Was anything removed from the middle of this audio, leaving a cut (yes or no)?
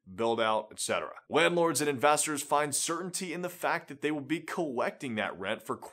no